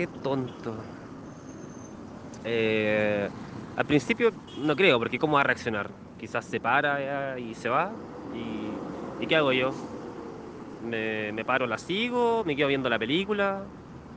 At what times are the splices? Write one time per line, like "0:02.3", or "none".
none